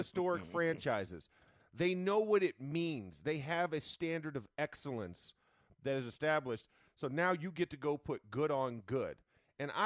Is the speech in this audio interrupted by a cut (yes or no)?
no